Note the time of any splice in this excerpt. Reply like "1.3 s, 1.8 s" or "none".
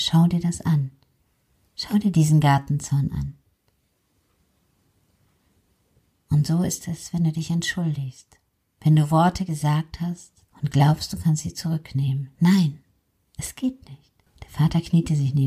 10.5 s, 14.3 s